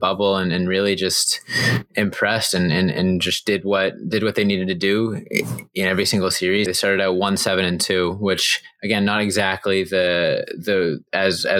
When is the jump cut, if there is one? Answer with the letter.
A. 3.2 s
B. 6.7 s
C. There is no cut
B